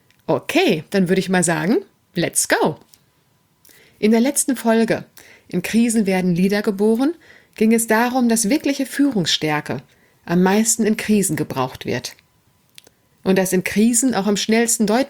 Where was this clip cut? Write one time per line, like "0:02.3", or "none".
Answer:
none